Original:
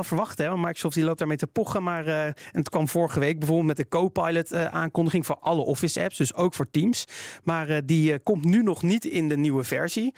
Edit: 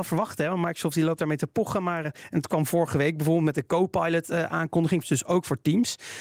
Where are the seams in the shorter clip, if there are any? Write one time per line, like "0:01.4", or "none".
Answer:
0:02.0
0:05.0